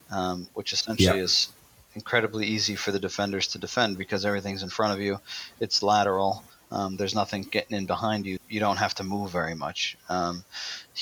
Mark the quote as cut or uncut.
cut